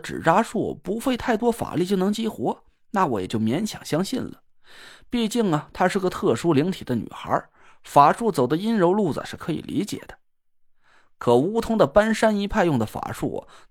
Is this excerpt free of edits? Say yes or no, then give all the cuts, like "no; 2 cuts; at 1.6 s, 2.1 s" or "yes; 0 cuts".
yes; 0 cuts